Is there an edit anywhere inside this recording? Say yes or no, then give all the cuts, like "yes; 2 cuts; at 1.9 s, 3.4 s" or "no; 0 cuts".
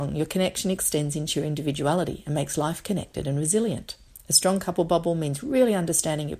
no; 0 cuts